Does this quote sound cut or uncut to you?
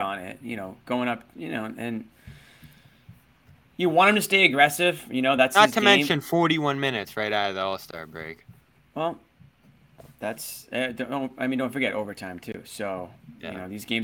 uncut